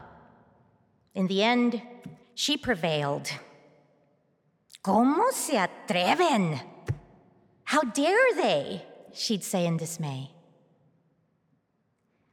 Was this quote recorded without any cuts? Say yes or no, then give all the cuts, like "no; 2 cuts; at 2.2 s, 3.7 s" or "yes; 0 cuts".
no; 1 cut; at 2.2 s